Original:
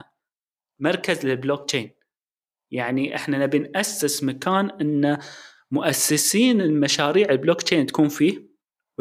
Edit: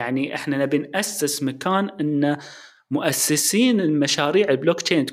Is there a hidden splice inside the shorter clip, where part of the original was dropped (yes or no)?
no